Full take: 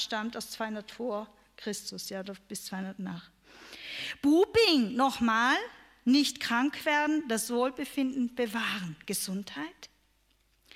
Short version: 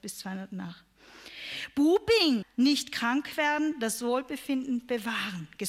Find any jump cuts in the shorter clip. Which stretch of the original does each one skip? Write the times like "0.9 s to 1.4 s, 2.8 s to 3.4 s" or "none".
4.9 s to 5.9 s